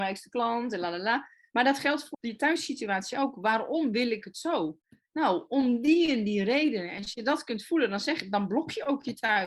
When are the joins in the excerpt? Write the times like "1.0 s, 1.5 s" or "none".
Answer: 2.1 s

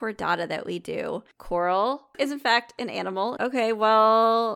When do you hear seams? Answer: 2.1 s, 3.4 s

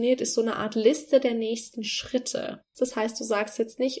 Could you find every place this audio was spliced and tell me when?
2.7 s

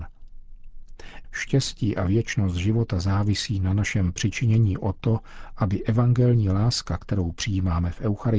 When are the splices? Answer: 1.2 s

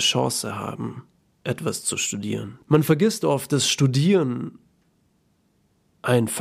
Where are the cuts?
1.2 s, 2.6 s

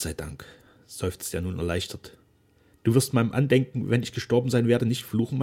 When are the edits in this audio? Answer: 2.7 s

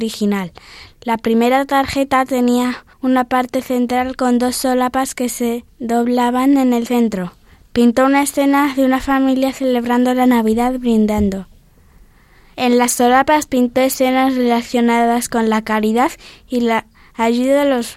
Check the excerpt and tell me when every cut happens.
2.9 s

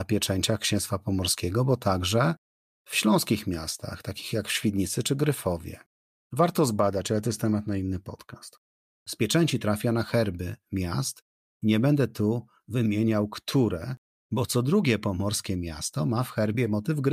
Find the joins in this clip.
none

